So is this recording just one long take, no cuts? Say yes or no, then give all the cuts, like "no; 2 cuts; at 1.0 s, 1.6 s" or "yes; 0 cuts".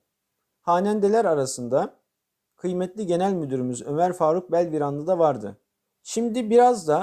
no; 1 cut; at 5.9 s